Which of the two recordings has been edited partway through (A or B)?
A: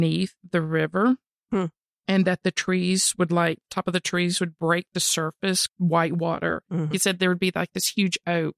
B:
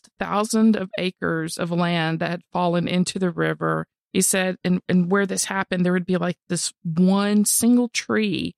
A